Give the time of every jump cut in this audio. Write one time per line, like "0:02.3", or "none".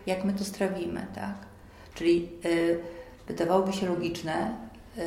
0:01.9